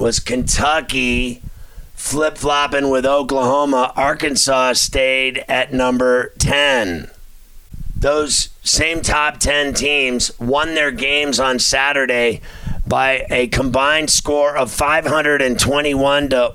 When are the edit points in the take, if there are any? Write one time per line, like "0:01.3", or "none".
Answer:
none